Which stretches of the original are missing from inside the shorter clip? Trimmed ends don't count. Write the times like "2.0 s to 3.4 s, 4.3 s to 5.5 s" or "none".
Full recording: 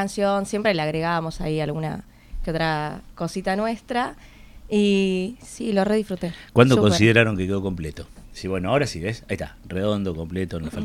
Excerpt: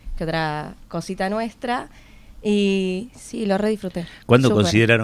none